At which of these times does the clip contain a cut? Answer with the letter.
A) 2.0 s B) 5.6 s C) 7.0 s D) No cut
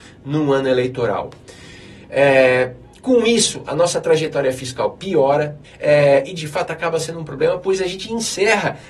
B